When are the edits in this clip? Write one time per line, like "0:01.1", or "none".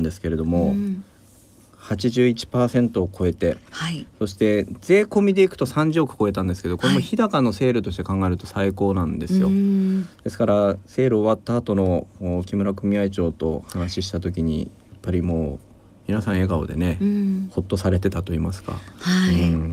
none